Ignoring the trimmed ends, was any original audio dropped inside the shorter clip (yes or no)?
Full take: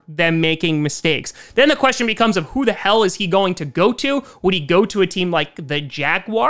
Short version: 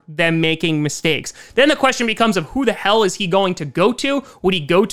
no